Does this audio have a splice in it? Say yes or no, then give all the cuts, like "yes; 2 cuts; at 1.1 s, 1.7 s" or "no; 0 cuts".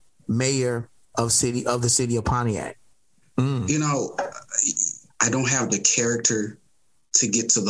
yes; 2 cuts; at 3.2 s, 5.1 s